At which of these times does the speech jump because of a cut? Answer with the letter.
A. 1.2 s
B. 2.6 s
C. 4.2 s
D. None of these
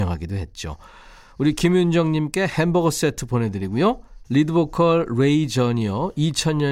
C